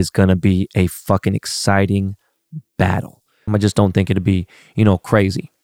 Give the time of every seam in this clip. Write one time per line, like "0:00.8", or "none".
0:03.5